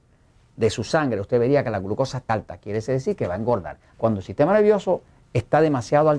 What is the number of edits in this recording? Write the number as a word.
two